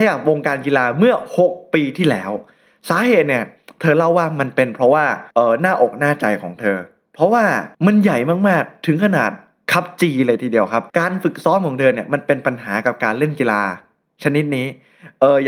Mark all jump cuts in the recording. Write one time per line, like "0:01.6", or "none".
0:05.3
0:07.7
0:10.9